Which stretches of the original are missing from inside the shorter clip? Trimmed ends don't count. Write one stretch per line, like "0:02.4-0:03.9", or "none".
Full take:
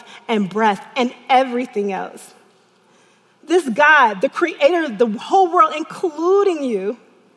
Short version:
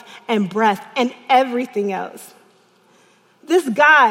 none